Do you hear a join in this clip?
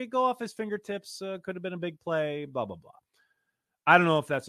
no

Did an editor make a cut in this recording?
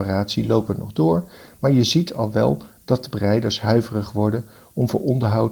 no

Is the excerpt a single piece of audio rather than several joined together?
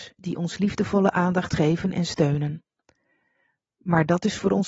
yes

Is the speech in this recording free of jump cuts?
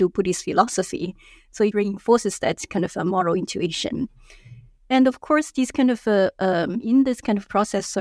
no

